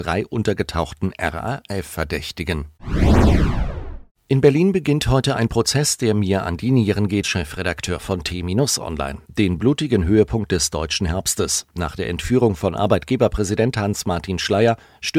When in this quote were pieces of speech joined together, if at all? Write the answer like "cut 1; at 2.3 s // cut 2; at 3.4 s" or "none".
cut 1; at 7.2 s // cut 2; at 9.3 s